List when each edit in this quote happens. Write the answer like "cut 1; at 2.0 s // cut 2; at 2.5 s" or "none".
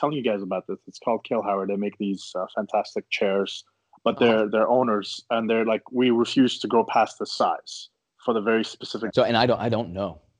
cut 1; at 9.1 s

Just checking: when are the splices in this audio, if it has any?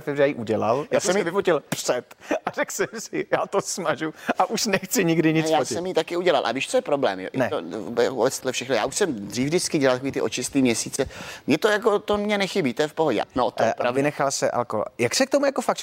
cut 1; at 8.4 s // cut 2; at 13.2 s

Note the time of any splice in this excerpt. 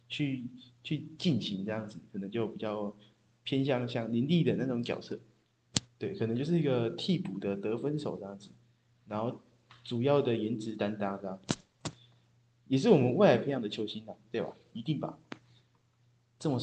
none

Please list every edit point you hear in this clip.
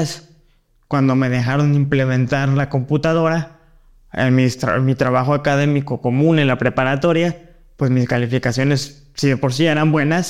none

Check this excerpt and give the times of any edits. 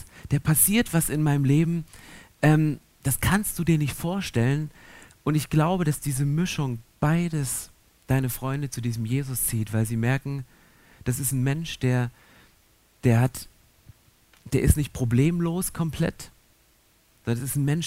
none

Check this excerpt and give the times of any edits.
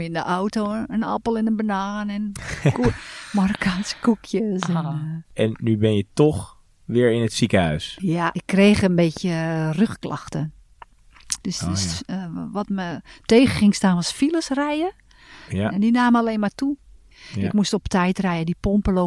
cut 1; at 11.4 s

